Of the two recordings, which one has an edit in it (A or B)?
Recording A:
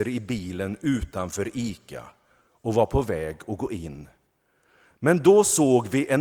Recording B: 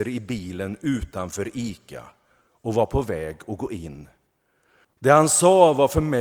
B